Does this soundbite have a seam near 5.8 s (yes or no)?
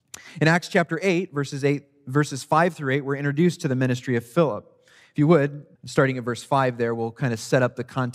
yes